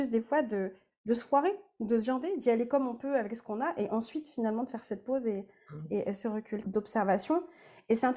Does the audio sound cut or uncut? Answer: cut